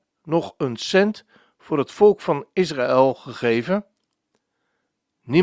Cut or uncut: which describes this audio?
uncut